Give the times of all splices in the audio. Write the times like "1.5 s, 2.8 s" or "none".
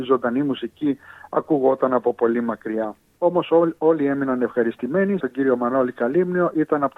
3.2 s, 5.2 s